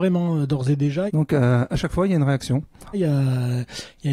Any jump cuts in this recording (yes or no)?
yes